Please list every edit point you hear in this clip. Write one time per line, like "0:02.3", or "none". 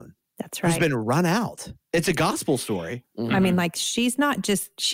0:03.0